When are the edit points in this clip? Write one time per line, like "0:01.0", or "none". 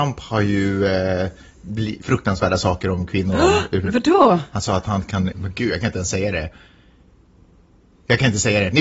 0:02.0
0:05.3